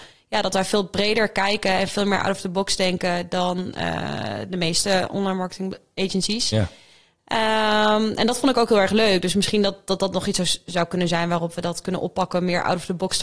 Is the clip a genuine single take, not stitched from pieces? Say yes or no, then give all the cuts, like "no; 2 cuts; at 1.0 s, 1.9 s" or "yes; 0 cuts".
yes; 0 cuts